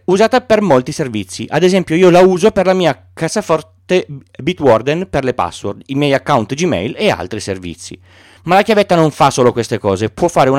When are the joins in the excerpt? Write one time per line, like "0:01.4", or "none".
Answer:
0:08.4